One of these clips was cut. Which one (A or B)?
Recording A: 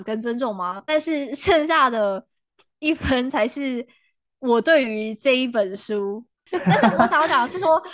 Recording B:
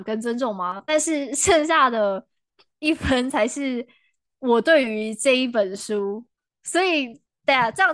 A